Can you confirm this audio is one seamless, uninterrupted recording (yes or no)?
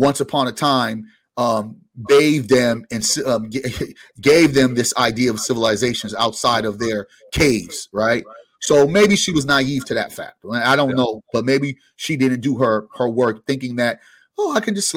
yes